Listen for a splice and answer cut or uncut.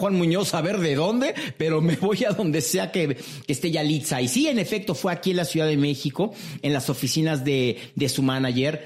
uncut